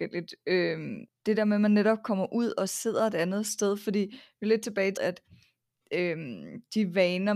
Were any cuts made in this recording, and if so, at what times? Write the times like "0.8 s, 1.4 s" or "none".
1.1 s, 5.0 s